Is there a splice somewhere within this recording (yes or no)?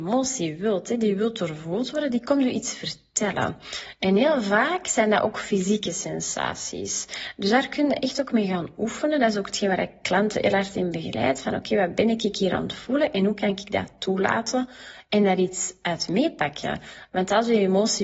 no